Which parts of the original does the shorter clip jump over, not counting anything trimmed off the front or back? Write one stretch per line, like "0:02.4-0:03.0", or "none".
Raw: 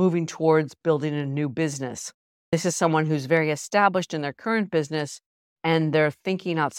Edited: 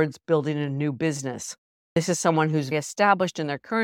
0:03.3-0:03.5